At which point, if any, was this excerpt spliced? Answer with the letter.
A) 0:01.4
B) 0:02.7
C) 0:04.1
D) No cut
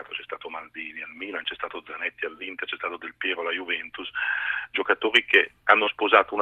D